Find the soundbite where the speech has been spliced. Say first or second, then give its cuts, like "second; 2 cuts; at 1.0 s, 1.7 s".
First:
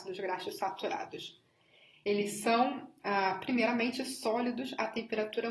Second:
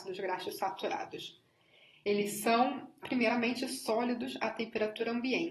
second; 1 cut; at 3.0 s